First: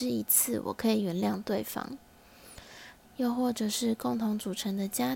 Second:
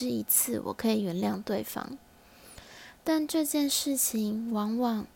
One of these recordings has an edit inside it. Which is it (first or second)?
first